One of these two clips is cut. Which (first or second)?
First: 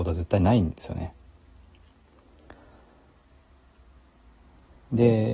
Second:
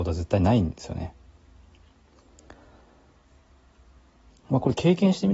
second